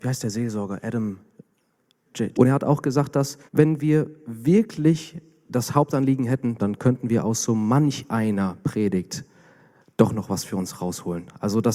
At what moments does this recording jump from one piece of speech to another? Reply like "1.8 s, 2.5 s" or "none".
2.3 s, 3.5 s, 6.6 s